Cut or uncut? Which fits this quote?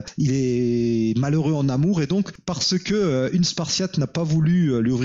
uncut